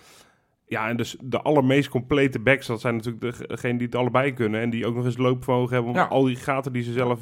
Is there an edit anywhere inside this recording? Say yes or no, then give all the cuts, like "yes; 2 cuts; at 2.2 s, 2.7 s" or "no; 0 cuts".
no; 0 cuts